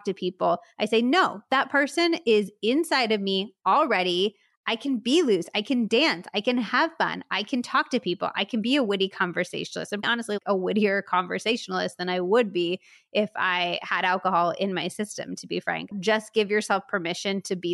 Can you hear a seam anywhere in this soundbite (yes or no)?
yes